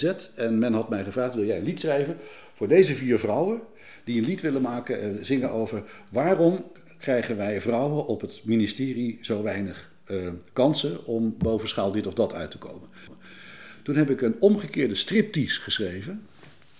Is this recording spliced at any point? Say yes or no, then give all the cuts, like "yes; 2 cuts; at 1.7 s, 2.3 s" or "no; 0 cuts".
no; 0 cuts